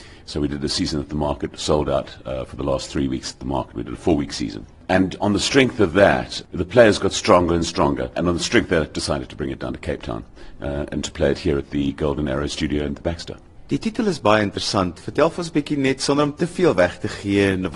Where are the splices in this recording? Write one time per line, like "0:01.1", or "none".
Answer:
none